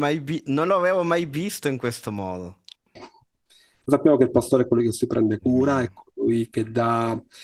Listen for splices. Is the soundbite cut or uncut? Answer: cut